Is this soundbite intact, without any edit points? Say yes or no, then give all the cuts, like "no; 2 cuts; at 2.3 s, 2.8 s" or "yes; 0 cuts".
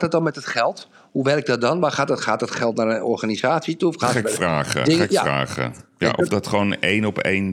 yes; 0 cuts